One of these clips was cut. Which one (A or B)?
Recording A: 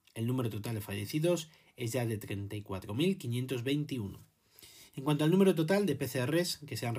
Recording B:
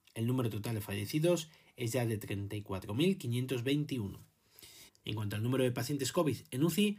B